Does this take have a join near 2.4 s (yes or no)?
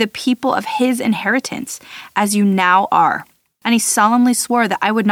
no